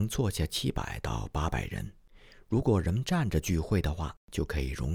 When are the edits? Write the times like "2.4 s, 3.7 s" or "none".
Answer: none